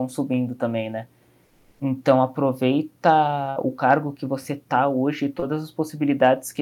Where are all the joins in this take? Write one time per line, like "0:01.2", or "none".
none